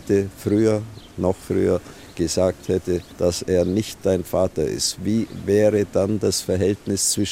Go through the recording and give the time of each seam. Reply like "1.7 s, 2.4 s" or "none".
3.1 s